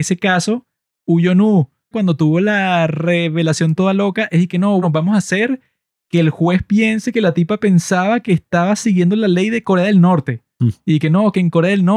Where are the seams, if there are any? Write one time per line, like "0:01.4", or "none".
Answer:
0:01.9
0:04.8